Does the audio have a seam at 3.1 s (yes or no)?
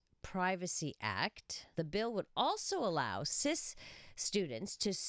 no